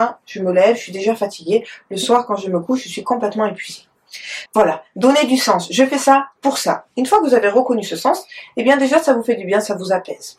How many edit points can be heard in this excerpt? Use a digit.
1